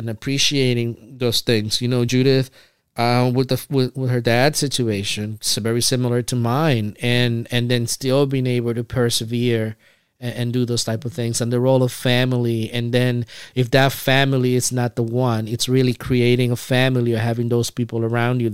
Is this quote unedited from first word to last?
yes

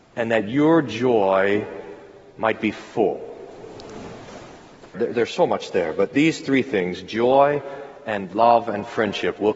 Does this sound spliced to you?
yes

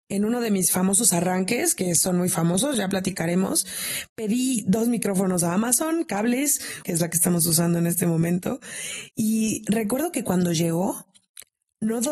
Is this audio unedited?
no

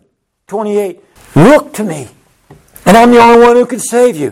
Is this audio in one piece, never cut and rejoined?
no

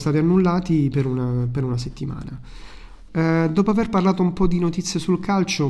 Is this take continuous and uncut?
no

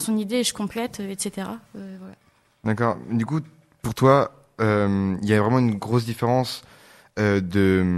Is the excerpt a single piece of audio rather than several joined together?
yes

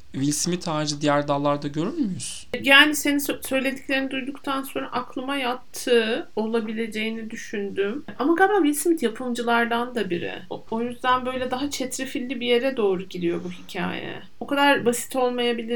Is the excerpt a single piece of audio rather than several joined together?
no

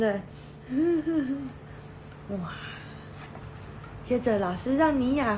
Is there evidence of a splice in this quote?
no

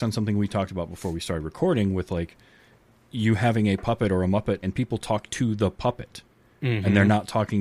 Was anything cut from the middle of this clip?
yes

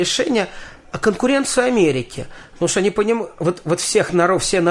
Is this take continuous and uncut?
yes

